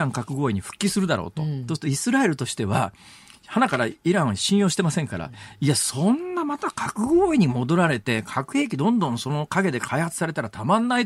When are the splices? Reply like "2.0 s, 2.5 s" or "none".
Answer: none